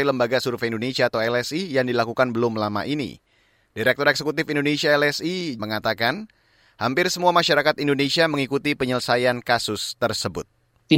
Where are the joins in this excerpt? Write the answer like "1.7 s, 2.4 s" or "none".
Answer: 5.6 s